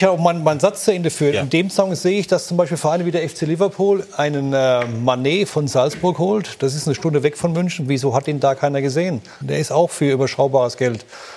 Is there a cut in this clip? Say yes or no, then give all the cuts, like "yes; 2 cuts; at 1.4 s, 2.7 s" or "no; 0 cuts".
yes; 1 cut; at 9.4 s